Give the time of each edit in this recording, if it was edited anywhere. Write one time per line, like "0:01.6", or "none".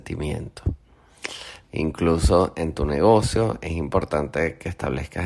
0:01.6

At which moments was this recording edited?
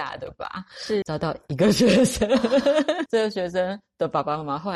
0:01.0
0:03.1

